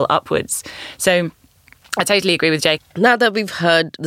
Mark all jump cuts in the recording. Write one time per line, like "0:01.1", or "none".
0:02.8